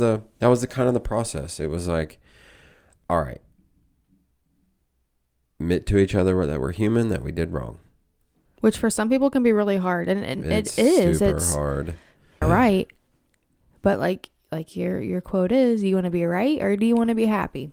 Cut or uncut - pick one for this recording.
cut